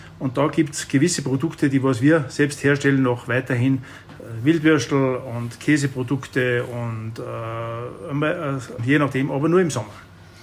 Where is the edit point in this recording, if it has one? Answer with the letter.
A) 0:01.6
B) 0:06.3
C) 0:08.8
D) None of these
C